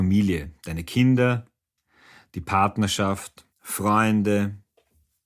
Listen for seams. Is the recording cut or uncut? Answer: cut